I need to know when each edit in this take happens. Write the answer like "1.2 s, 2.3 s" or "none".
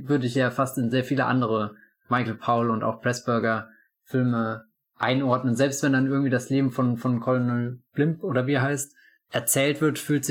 none